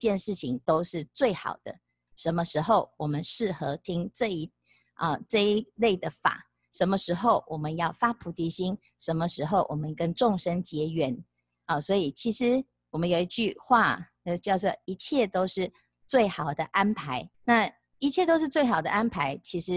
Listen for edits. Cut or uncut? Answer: cut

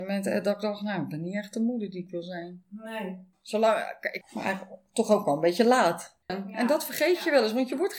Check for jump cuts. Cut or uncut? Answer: cut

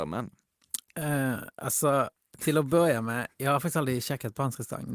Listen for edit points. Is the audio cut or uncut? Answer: uncut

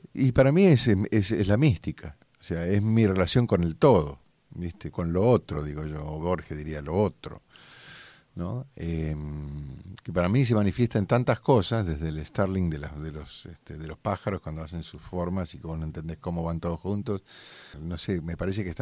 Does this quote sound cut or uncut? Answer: cut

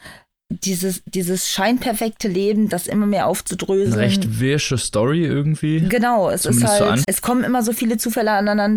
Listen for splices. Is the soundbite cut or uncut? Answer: cut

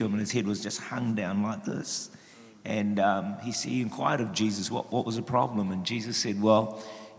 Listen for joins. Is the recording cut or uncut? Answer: uncut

